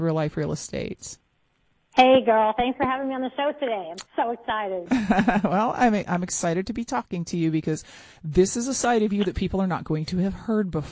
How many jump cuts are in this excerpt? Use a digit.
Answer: 0